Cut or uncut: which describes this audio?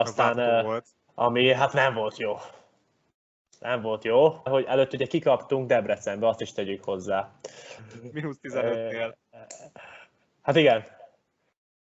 cut